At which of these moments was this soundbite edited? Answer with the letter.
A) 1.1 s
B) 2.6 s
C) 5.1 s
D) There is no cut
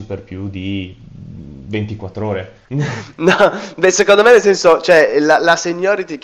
B